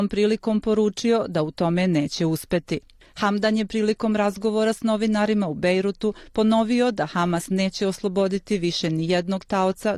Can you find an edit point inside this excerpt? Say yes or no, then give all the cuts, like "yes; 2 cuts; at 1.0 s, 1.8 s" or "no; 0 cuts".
no; 0 cuts